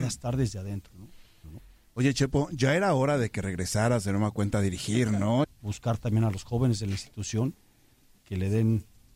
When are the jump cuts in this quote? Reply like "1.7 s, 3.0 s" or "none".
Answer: 1.4 s, 5.4 s